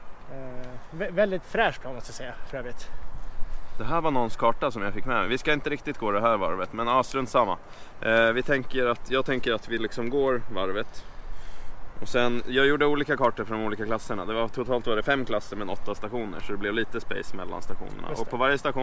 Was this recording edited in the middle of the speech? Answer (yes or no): no